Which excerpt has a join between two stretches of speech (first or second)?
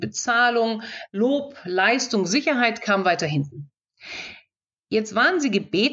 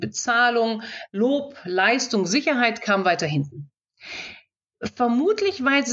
second